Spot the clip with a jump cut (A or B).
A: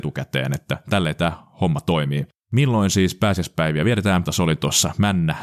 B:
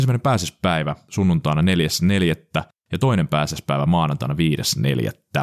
A